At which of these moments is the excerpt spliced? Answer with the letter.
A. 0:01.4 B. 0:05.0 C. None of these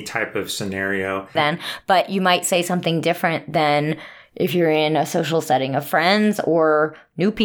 A